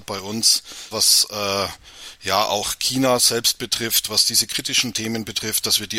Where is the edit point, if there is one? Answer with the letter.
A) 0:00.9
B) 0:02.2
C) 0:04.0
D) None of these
A